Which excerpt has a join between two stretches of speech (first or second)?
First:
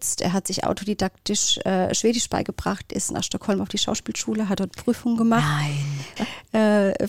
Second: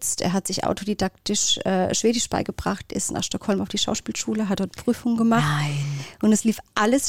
first